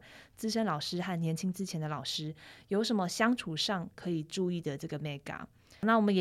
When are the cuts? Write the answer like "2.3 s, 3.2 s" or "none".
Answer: none

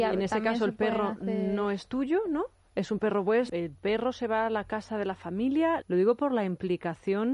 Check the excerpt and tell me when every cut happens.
3.5 s, 5.8 s

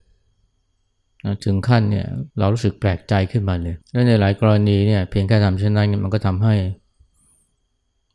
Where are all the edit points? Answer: 2.3 s, 3.8 s

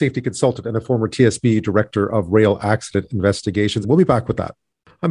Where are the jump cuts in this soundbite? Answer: 3.8 s

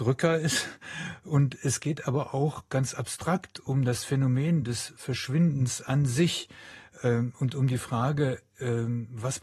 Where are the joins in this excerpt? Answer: none

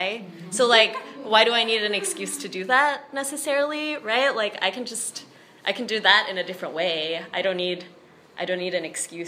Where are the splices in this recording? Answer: none

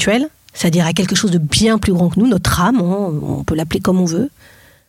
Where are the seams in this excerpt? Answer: none

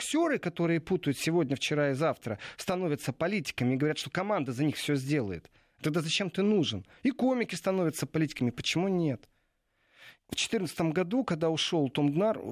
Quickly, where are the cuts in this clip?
10.2 s

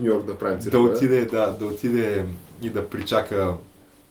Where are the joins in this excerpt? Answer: none

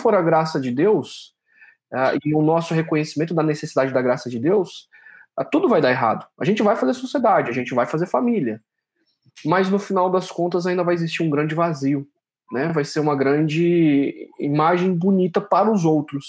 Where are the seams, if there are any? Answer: none

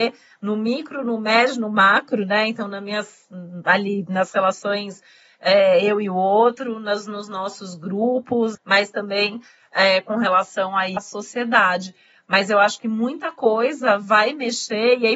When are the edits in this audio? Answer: 8.5 s, 11.0 s

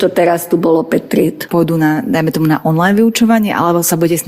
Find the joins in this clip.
1.5 s

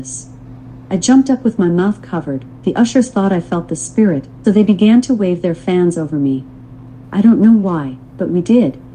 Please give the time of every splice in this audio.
4.4 s, 7.0 s

